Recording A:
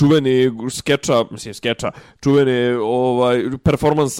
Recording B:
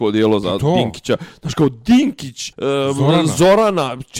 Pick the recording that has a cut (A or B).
B